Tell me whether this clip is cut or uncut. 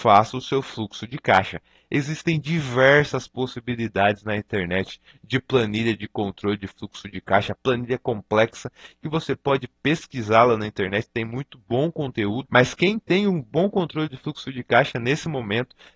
cut